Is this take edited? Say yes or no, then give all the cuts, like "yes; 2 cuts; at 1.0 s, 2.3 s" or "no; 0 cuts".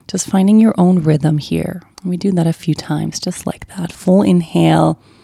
yes; 1 cut; at 1.9 s